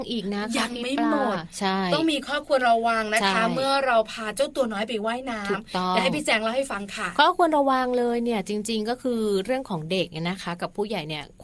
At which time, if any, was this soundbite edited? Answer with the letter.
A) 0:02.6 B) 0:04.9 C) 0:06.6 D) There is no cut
A